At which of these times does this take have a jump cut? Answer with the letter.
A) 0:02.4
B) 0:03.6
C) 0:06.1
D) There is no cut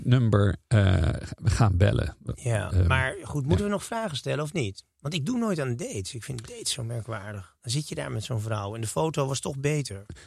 D